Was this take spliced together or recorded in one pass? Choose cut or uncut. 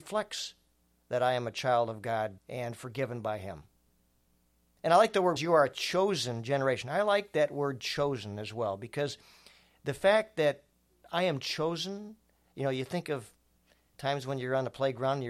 cut